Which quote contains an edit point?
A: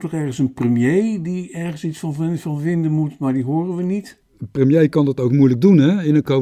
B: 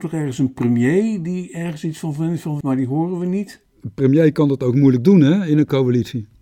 B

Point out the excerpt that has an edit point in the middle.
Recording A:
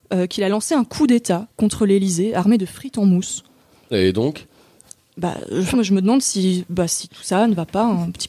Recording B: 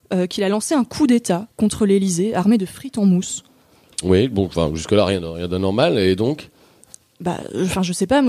A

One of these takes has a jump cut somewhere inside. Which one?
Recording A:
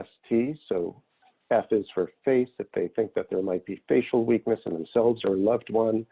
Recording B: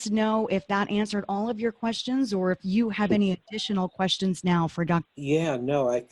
B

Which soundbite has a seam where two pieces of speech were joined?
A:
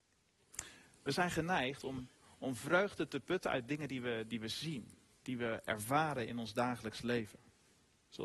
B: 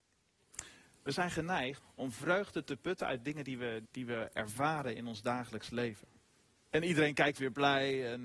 B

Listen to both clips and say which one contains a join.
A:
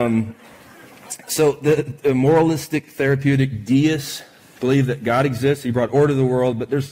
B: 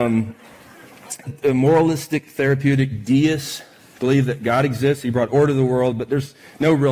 B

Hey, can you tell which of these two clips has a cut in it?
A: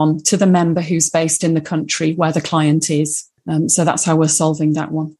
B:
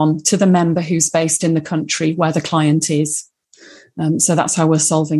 A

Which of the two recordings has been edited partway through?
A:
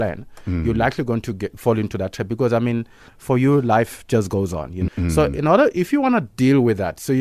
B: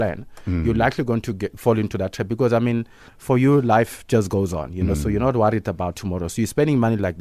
A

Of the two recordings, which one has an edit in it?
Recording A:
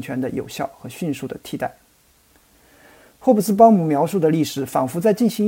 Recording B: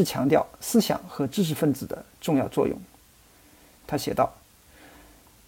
B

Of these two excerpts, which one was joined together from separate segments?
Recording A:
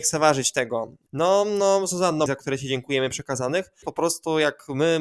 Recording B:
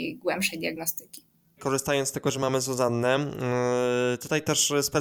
A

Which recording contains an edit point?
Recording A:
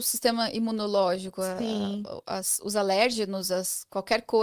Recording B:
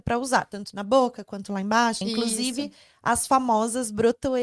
B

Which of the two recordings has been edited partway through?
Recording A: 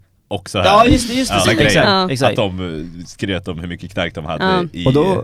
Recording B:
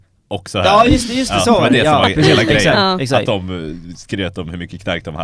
A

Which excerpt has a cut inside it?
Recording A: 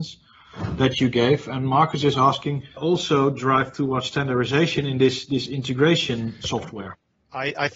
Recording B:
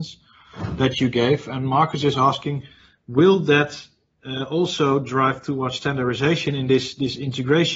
A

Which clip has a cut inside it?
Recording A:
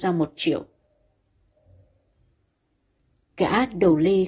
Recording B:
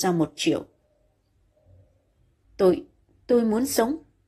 B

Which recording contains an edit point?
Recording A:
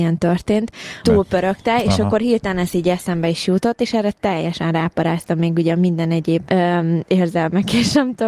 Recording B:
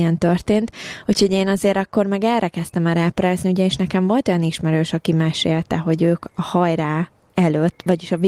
A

